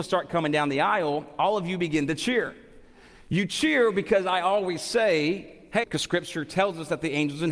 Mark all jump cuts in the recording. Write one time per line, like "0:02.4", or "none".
0:05.8